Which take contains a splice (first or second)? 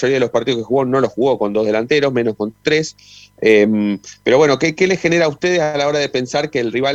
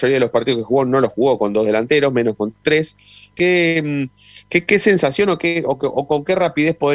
second